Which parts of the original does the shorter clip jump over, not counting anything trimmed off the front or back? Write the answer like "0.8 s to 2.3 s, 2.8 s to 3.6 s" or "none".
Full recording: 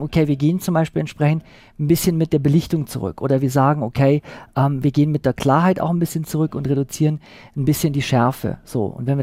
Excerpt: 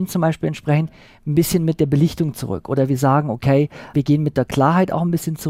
4.5 s to 4.8 s